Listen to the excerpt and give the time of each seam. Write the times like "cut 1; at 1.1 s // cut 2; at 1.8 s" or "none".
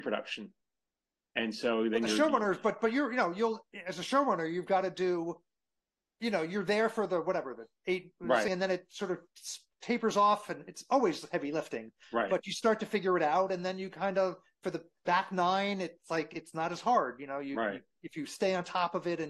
cut 1; at 8.5 s